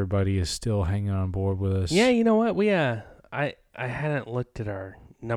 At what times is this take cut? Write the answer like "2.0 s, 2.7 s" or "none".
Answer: none